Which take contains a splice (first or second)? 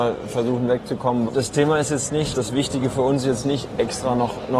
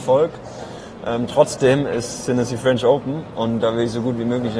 first